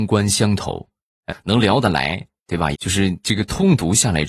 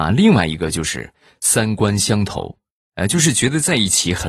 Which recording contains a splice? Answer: first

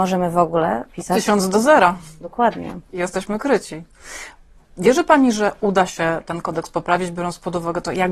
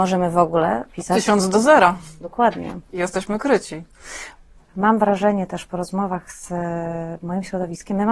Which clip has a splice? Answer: second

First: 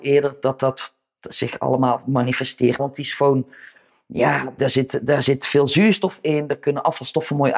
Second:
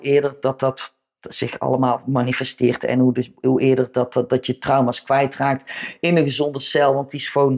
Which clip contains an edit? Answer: first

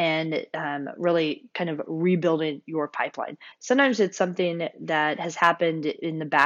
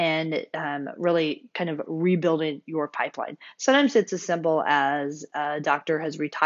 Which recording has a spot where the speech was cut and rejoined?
first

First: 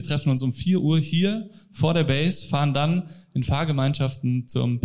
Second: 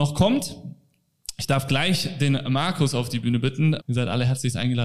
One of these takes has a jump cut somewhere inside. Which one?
second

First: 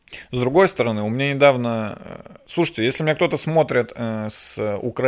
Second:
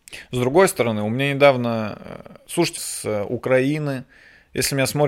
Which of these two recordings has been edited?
second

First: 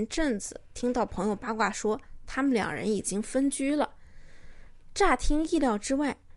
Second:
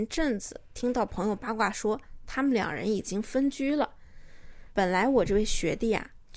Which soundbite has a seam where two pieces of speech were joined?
second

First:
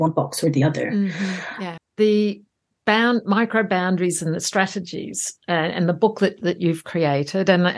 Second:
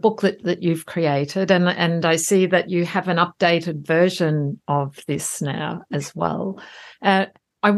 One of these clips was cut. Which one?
first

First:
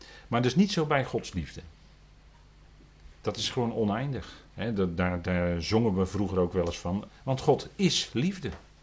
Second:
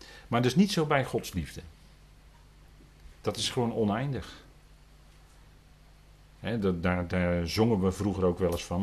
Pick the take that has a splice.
first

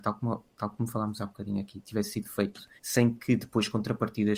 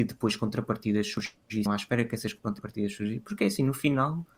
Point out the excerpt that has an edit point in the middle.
first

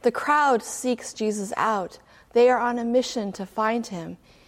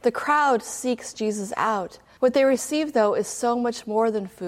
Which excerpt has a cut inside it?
second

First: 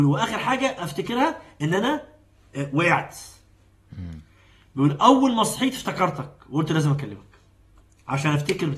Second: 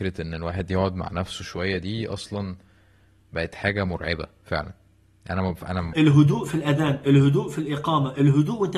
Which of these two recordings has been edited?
second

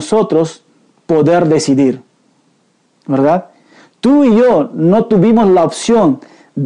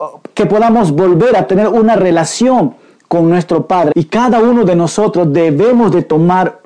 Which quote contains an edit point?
second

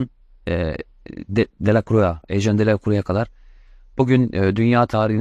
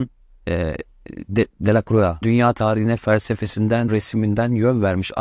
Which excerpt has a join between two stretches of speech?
second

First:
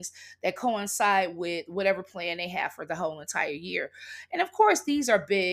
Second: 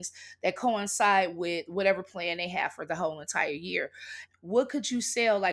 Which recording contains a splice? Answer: second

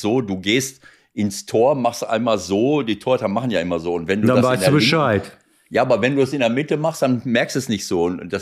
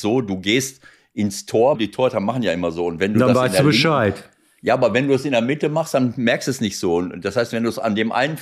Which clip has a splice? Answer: second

